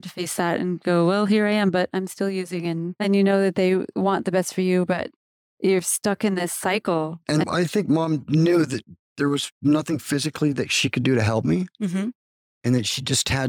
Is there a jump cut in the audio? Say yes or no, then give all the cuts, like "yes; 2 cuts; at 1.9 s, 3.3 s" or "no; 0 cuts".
no; 0 cuts